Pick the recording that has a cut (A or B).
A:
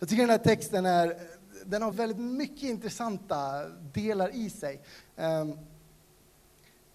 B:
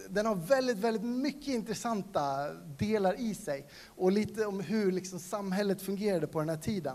A